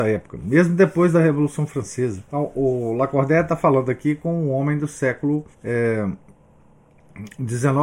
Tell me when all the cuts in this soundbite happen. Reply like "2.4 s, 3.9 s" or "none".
2.2 s, 5.5 s